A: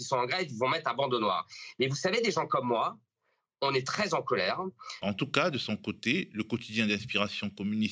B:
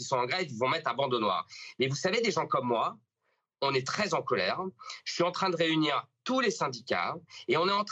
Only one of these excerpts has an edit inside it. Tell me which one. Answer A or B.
A